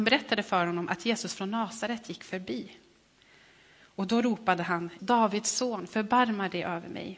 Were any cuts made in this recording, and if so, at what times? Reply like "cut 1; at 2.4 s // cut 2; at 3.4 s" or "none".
cut 1; at 5.0 s